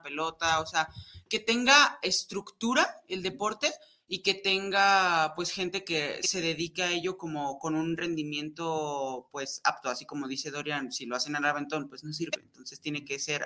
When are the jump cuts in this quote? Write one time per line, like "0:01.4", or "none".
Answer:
none

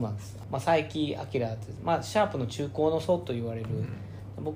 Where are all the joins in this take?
none

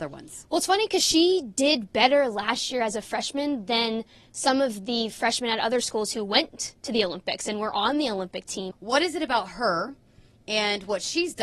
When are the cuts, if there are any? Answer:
0:08.7

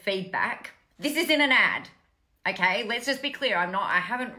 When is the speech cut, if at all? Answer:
0:00.9

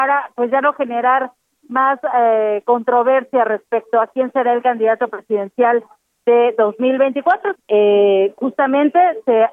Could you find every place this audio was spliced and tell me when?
0:07.5

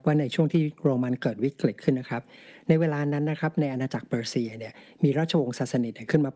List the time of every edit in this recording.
none

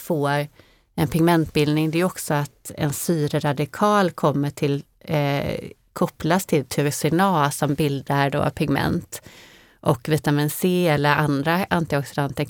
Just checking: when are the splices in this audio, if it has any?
none

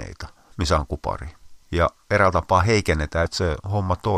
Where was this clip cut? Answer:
0:01.6
0:03.3

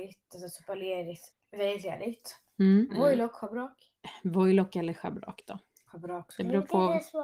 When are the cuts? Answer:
0:01.3
0:02.9

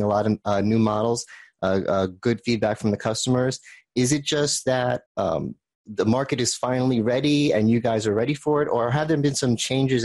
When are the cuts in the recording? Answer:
0:05.1

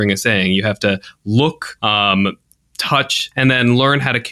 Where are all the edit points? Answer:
0:01.8
0:03.3

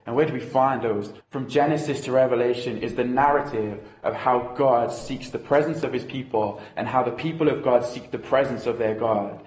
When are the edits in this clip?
0:01.2

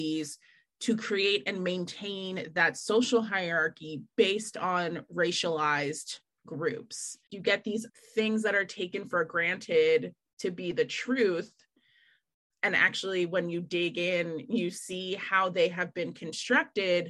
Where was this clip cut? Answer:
none

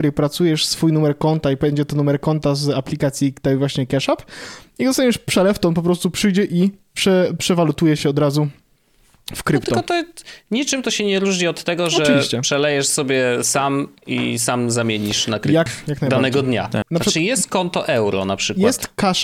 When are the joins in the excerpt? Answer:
0:15.7
0:16.8

